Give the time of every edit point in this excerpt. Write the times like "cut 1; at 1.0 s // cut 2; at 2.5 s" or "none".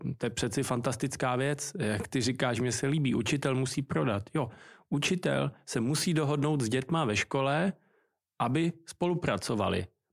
none